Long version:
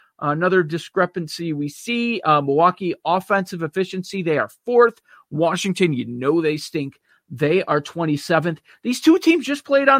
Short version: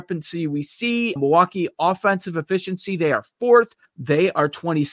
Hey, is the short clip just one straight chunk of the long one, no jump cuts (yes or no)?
no